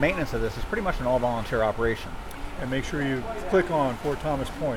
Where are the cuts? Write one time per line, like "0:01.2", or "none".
0:02.5

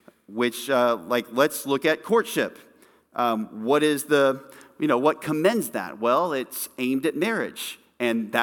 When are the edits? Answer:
none

